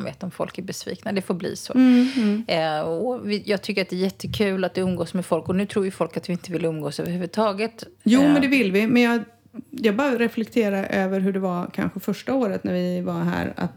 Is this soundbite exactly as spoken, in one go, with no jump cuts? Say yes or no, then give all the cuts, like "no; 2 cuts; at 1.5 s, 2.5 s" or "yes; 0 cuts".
yes; 0 cuts